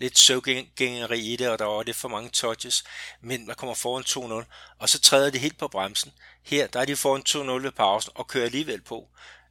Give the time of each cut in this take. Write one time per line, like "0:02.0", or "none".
0:03.5